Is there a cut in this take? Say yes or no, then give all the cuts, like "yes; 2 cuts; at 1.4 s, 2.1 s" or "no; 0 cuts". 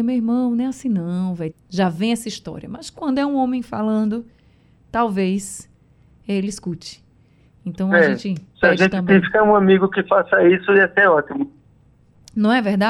yes; 1 cut; at 1.5 s